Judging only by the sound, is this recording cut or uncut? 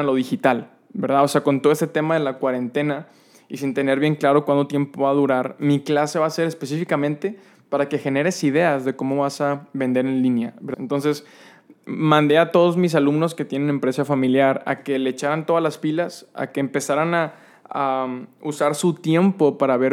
cut